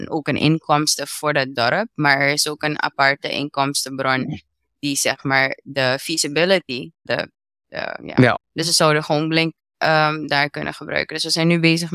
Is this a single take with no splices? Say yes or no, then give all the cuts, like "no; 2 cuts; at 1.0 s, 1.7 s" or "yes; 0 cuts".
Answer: no; 2 cuts; at 7.1 s, 8.4 s